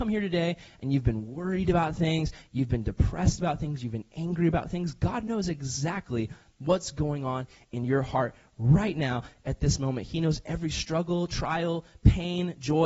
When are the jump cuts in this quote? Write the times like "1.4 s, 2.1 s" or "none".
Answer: none